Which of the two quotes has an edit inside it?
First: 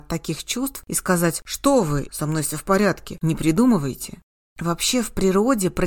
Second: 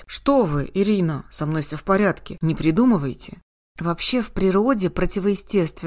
first; 1 cut; at 2.1 s

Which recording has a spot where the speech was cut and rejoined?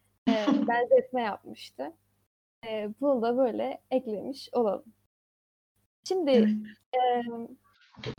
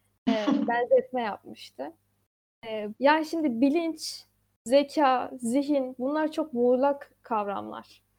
second; 1 cut; at 2.9 s

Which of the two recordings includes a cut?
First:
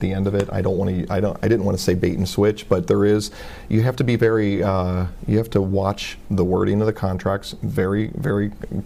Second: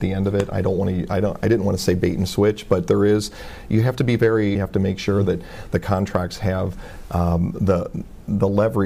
second; 1 cut; at 4.6 s

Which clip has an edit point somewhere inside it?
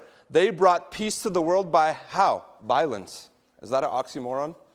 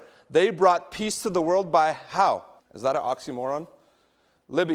second; 1 cut; at 2.6 s

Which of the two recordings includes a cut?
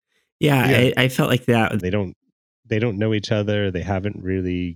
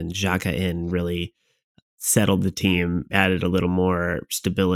first; 1 cut; at 1.8 s

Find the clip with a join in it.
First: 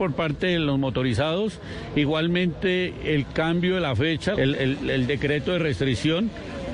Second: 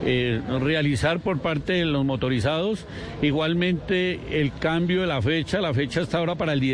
first; 1 cut; at 4.3 s

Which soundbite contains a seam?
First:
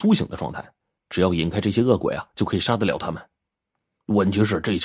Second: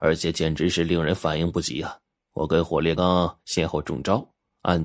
second; 1 cut; at 3.0 s

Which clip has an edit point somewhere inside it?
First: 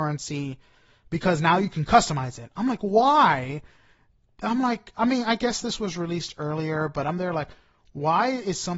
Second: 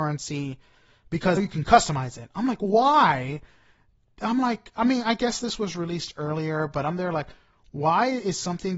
second; 1 cut; at 1.4 s

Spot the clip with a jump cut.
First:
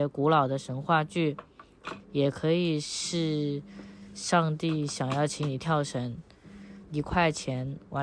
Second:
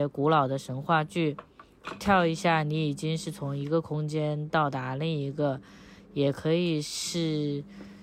first; 2 cuts; at 2.0 s, 6.8 s

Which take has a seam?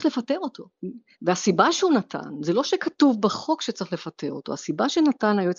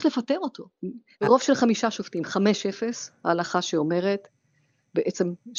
second; 1 cut; at 1.2 s

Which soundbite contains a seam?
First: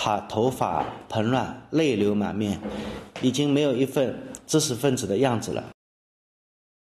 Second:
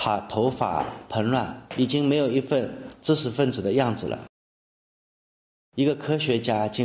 second; 1 cut; at 1.7 s

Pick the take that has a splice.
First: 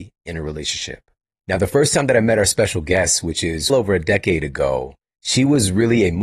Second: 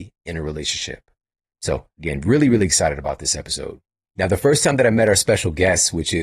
first; 2 cuts; at 1.3 s, 3.7 s

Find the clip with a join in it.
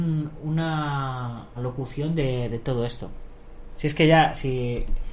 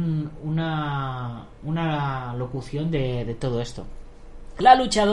first; 2 cuts; at 1.6 s, 3.8 s

